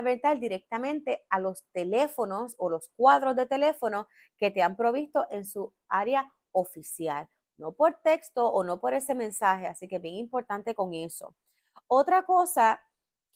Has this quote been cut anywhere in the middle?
no; 0 cuts

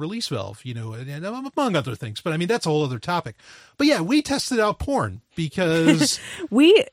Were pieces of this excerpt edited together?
no; 0 cuts

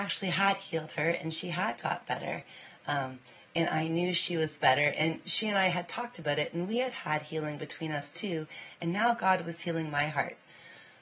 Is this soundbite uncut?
yes; 0 cuts

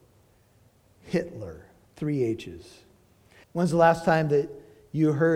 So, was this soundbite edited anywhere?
yes; 1 cut; at 3.4 s

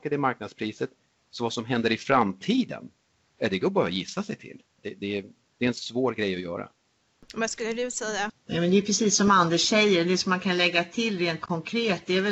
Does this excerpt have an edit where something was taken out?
yes; 2 cuts; at 4.8 s, 8.3 s

